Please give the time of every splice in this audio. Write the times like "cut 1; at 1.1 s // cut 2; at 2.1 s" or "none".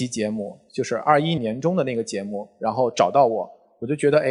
cut 1; at 1.4 s